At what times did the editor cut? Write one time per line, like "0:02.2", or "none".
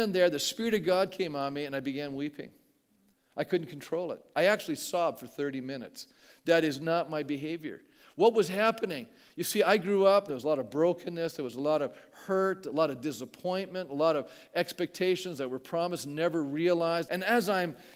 0:10.3
0:17.0